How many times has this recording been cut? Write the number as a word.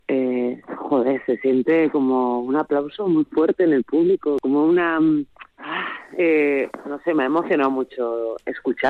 one